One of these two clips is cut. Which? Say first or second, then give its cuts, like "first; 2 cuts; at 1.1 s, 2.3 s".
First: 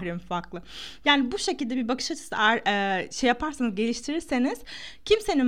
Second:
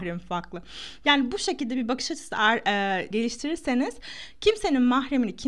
second; 1 cut; at 3.1 s